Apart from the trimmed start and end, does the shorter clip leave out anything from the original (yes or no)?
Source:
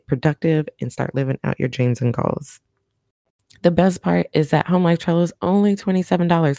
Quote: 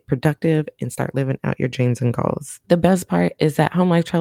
yes